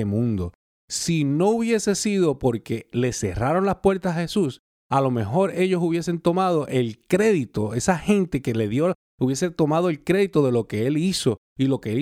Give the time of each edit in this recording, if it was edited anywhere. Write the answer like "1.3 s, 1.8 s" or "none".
9.0 s